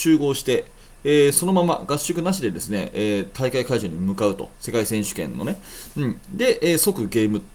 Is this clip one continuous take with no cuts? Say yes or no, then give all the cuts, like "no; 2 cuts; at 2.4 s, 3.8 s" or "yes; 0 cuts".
yes; 0 cuts